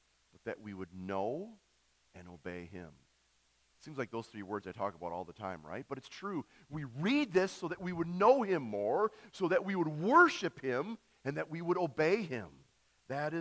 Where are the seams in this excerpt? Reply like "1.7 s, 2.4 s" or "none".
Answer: 2.0 s